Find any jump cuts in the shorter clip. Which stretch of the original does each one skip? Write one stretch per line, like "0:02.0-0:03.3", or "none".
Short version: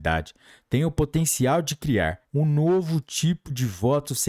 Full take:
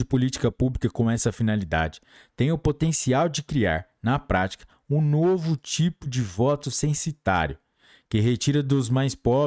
0:03.9-0:04.8